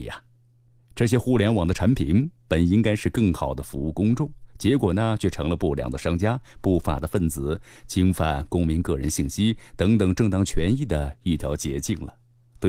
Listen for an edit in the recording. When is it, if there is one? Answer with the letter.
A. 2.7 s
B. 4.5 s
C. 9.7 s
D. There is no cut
D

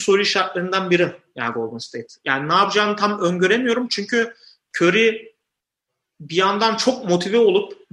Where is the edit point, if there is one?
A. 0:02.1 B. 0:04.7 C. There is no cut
C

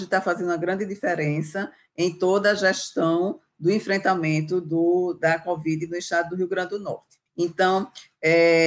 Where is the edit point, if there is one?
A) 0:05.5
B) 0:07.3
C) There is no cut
B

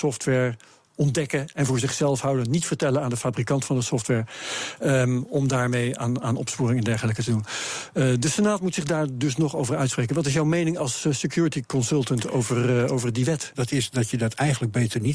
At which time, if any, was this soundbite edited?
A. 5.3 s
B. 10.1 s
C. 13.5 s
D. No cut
C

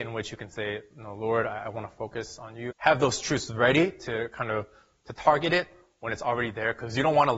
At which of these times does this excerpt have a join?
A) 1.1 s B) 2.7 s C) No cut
B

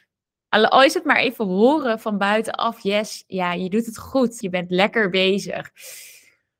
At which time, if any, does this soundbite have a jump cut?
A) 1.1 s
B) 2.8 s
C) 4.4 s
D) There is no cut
C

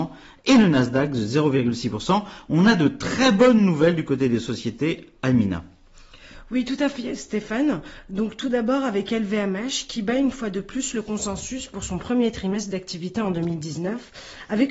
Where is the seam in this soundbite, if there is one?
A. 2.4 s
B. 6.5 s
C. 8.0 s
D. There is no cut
D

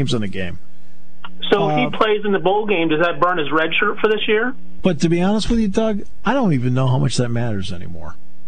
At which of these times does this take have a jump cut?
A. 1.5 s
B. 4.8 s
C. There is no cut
B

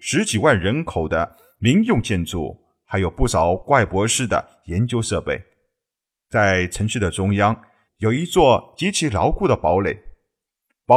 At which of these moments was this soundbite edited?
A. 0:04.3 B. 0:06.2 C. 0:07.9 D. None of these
C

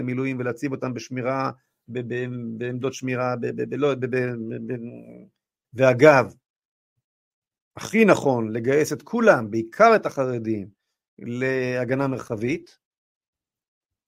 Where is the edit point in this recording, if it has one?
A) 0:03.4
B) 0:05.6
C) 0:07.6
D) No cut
B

